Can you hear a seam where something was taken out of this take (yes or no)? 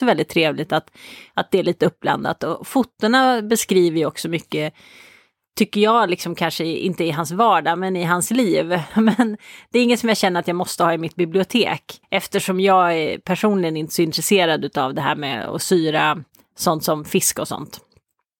yes